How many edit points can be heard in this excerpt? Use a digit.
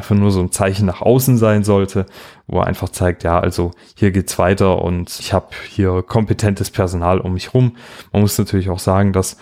1